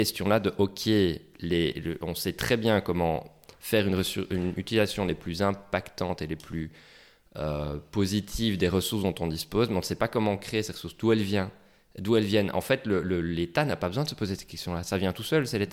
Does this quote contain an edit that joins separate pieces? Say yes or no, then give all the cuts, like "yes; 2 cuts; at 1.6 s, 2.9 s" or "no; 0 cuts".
no; 0 cuts